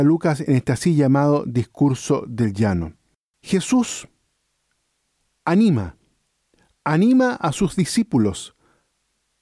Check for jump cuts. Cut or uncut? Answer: cut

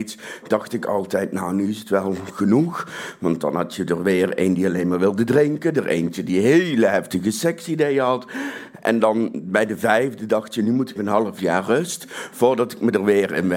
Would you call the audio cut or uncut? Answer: cut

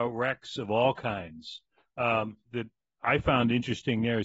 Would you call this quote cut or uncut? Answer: cut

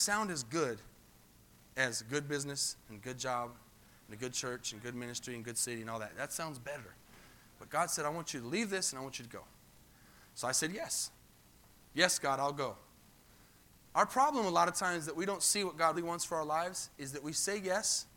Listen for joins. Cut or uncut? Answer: cut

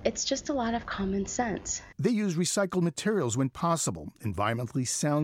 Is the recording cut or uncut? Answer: cut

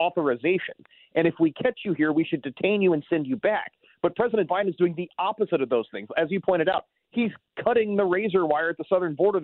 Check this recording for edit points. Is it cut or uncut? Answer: uncut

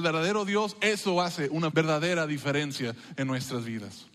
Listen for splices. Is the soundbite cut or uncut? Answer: cut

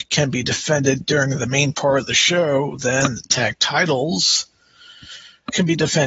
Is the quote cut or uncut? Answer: uncut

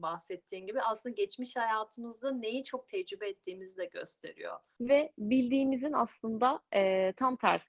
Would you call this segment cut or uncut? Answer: cut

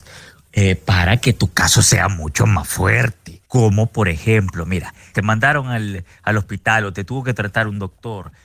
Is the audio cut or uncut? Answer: cut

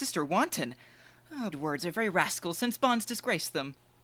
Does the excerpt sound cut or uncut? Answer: cut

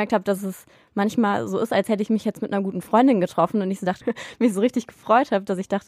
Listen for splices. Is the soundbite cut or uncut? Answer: cut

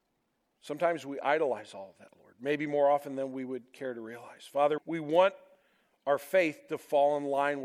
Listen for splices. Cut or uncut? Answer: cut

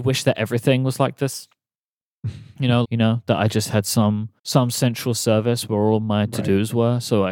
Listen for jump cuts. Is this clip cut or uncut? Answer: cut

